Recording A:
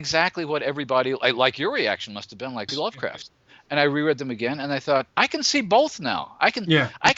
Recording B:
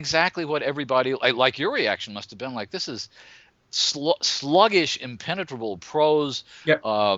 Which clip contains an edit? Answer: A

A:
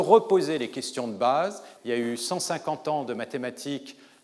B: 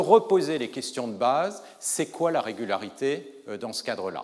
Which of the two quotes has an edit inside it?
A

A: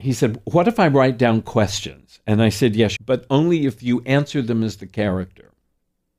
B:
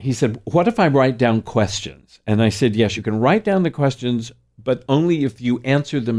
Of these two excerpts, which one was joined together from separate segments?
A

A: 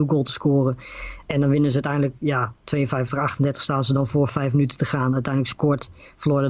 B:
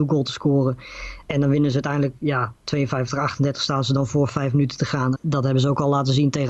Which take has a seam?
B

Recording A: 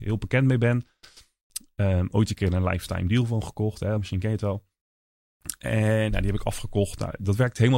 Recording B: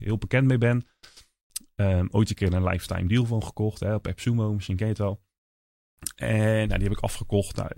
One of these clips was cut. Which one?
A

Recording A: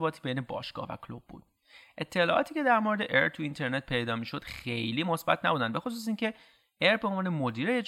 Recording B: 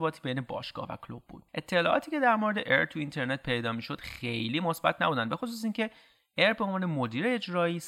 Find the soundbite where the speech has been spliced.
B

